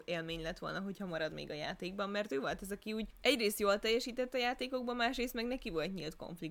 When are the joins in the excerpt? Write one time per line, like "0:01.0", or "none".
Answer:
0:03.1